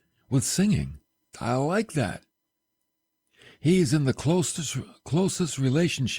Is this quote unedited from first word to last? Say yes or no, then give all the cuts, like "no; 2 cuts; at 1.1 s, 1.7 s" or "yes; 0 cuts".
no; 1 cut; at 1.3 s